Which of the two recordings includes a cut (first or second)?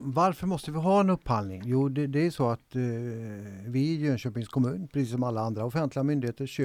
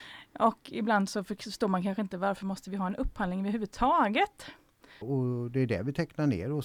second